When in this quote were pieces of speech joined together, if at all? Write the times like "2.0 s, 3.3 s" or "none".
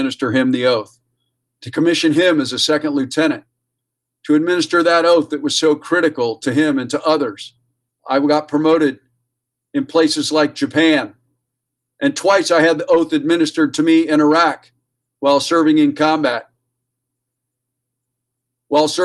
7.9 s